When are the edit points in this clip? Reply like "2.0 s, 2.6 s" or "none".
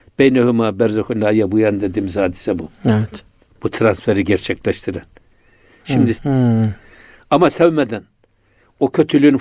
3.5 s, 6.2 s